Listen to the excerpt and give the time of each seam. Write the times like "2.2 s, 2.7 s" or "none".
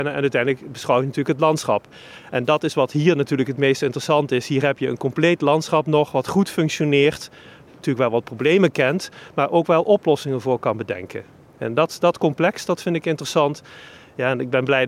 none